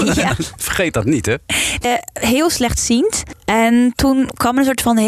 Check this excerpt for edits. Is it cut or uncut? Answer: cut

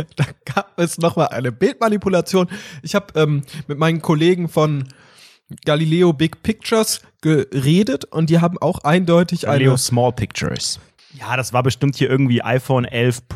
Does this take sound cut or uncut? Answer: cut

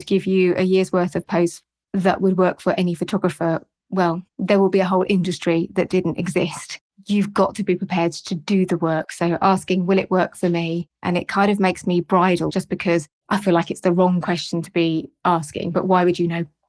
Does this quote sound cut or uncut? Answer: cut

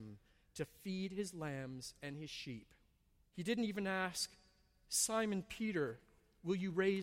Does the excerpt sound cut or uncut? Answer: cut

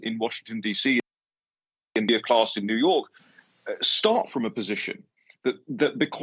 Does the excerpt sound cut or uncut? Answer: uncut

